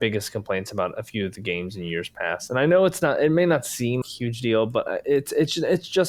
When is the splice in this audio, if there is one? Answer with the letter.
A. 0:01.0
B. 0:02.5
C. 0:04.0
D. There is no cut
C